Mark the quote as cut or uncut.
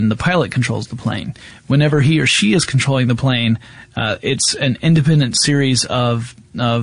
uncut